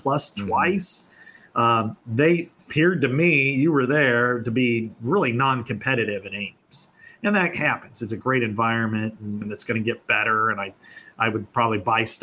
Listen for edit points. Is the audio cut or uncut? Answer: cut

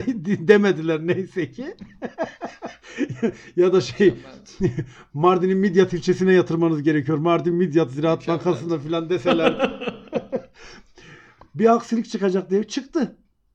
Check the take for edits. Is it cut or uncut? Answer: uncut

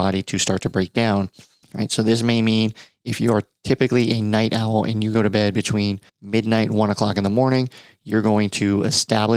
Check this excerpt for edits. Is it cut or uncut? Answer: cut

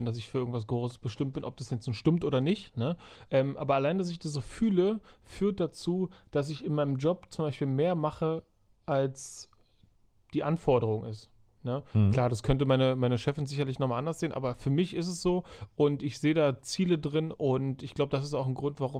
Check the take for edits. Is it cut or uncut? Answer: uncut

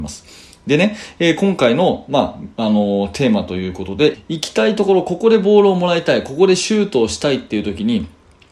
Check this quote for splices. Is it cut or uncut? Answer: cut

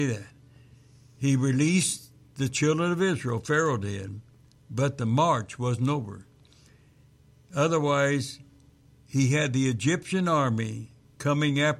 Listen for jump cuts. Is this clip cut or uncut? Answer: uncut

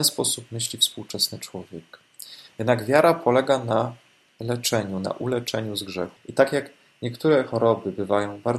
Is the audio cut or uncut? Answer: cut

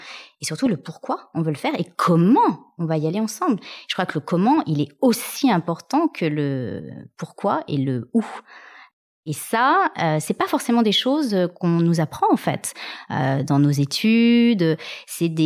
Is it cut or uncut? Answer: uncut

